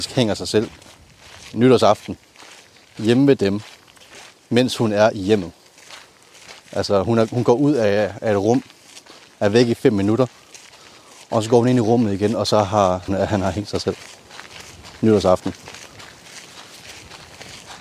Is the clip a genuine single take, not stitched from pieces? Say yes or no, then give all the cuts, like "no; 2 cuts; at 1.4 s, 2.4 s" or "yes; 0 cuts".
no; 2 cuts; at 6.6 s, 13.1 s